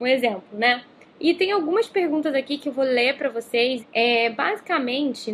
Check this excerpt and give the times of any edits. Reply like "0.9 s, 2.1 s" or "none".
1.1 s, 3.8 s

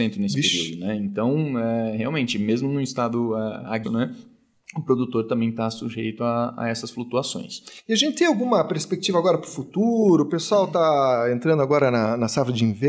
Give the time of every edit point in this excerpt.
3.8 s

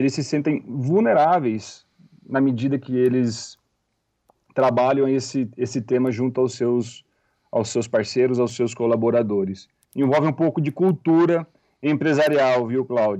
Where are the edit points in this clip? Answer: 9.8 s

